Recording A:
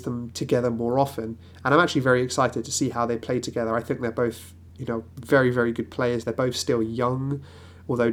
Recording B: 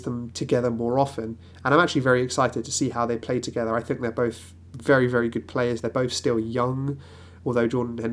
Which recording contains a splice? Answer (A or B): B